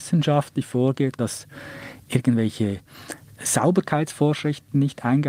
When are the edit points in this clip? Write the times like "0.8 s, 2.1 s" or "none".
1.2 s